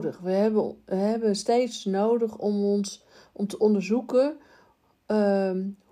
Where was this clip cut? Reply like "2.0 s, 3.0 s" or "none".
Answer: none